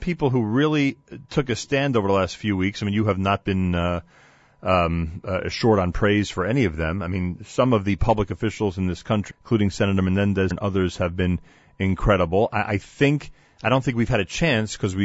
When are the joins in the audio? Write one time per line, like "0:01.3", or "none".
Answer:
0:09.3
0:10.5

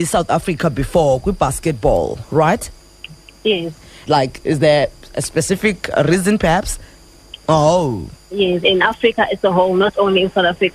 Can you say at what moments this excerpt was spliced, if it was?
0:04.1
0:07.4
0:08.6

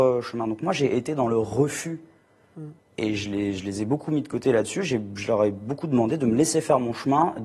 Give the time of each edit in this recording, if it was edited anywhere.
0:02.8

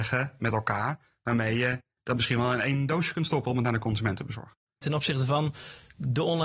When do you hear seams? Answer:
0:04.8

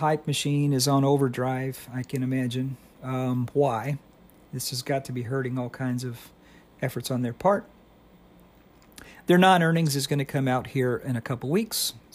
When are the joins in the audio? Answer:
none

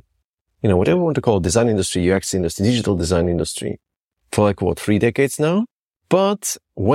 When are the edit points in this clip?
0:06.0

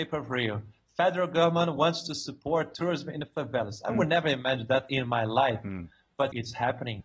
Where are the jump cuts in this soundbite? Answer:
none

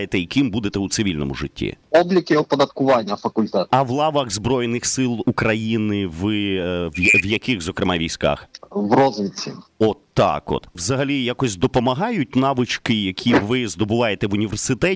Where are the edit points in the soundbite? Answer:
0:03.7

